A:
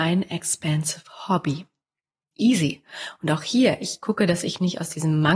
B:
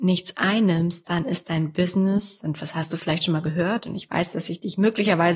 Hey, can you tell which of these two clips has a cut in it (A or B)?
A